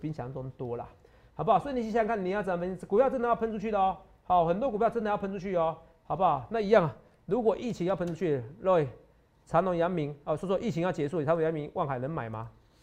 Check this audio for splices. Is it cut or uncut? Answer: uncut